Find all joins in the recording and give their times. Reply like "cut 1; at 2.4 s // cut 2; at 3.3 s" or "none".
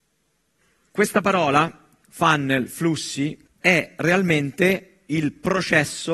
cut 1; at 3.6 s